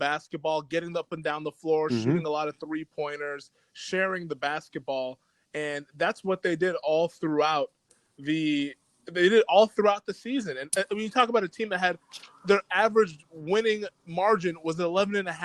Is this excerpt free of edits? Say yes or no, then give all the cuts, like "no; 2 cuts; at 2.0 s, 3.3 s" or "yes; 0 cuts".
no; 1 cut; at 14.0 s